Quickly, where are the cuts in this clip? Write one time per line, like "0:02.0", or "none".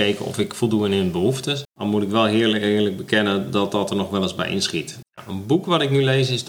0:01.6
0:05.0